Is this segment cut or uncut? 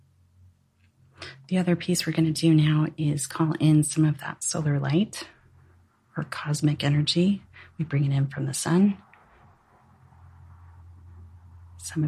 uncut